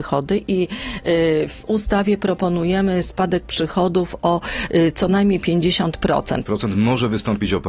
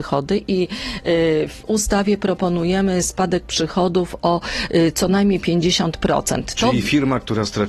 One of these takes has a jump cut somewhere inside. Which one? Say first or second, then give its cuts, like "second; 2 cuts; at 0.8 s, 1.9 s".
first; 1 cut; at 6.4 s